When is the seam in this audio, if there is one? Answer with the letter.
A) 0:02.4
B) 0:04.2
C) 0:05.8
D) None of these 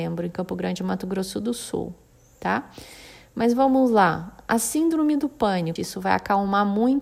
C